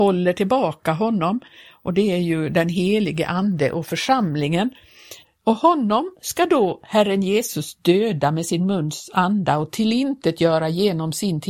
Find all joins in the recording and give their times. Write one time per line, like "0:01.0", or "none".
0:05.2